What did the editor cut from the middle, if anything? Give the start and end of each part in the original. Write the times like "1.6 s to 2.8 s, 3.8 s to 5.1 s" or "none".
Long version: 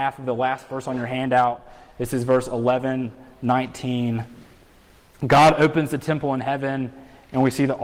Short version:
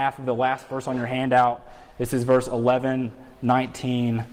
none